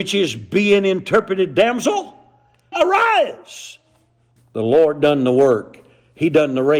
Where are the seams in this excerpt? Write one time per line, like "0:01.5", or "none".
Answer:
0:02.7
0:04.4